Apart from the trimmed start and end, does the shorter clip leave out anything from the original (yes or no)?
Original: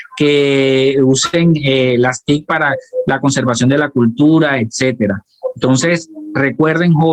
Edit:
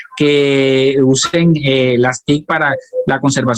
no